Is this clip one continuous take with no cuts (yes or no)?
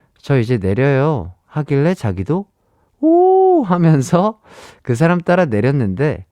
yes